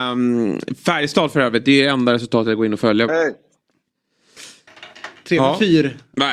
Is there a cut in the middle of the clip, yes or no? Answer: yes